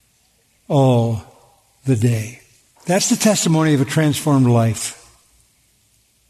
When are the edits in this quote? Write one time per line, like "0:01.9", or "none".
none